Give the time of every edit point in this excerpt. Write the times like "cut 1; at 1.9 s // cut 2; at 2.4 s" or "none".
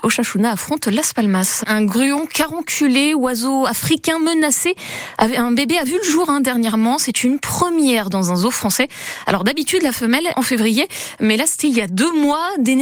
cut 1; at 1.6 s // cut 2; at 10.3 s